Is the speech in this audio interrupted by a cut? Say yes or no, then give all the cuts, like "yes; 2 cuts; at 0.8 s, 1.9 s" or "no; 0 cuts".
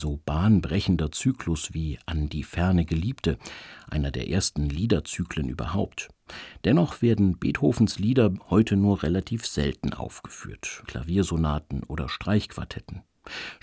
yes; 1 cut; at 10.8 s